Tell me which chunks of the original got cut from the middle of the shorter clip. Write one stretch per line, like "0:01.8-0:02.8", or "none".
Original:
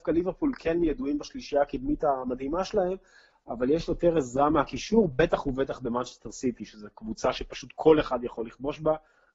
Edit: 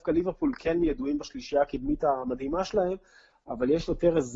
none